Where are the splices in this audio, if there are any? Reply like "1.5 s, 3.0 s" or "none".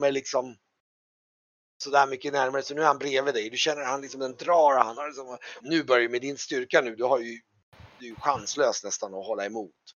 5.6 s